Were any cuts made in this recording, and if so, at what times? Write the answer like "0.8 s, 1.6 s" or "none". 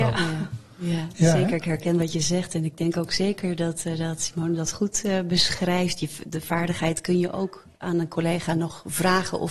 none

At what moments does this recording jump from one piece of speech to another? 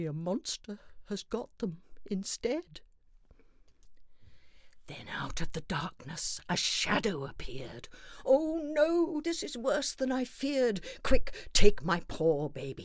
9.2 s

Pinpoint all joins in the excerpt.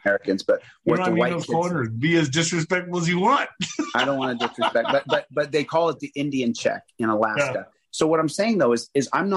7.9 s

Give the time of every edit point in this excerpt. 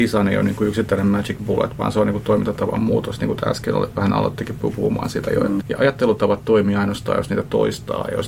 5.6 s

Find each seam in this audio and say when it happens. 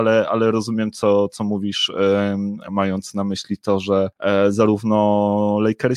none

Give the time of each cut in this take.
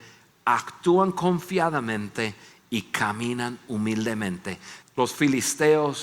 4.8 s

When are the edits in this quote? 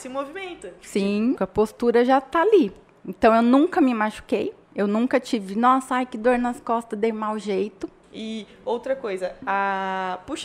1.4 s, 4.6 s, 8.0 s

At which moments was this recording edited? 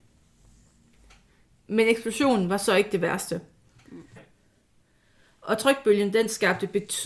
4.2 s

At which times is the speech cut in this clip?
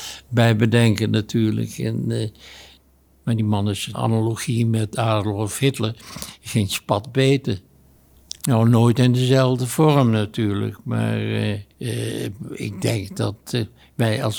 3.9 s, 8.4 s, 11.7 s

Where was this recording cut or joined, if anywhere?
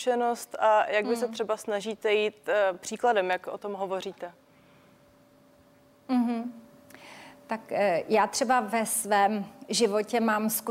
none

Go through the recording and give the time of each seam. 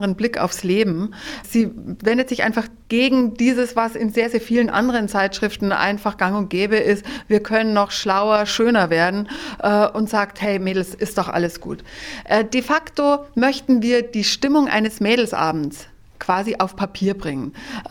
8.5 s

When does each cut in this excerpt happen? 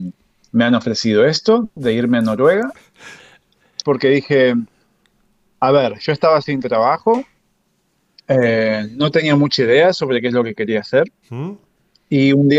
3.8 s

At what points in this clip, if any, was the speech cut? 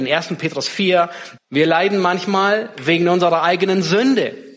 1.4 s

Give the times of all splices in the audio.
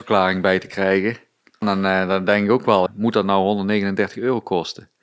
1.6 s, 2.9 s

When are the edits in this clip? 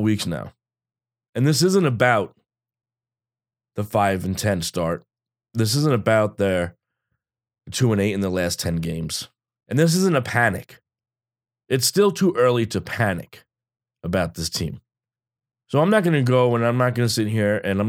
none

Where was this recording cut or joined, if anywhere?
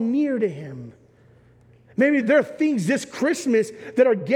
2.2 s

